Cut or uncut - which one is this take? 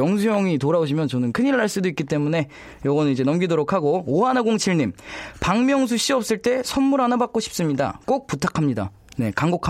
uncut